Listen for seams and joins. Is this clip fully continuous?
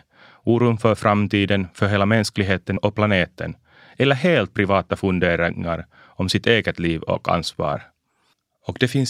yes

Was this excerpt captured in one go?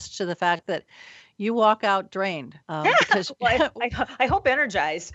no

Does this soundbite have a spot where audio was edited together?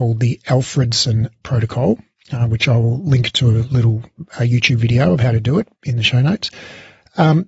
no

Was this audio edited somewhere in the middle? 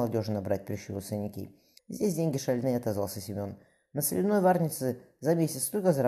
yes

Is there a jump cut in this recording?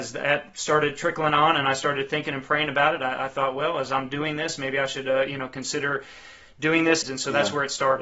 yes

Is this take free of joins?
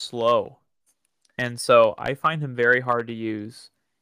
yes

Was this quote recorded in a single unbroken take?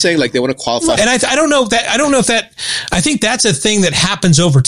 no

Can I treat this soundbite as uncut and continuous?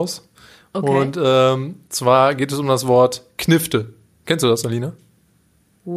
yes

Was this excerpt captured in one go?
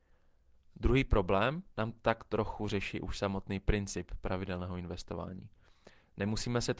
no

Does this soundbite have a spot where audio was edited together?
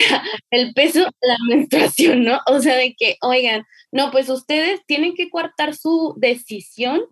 no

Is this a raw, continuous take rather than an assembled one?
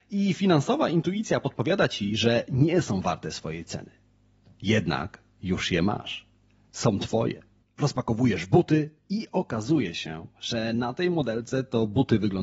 no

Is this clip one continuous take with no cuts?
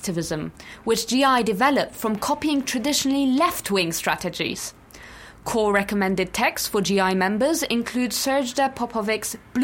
yes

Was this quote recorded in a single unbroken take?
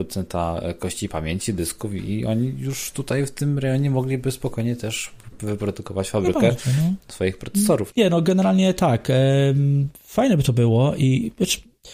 no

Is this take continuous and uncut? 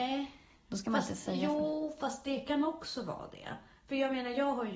yes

